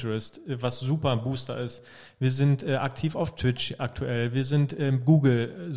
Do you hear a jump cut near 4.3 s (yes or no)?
no